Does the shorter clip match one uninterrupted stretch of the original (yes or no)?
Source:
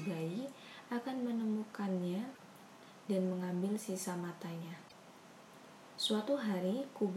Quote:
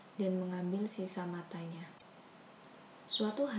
yes